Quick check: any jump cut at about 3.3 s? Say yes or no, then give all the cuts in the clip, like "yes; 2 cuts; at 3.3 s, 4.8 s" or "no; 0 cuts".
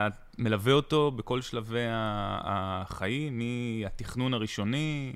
no; 0 cuts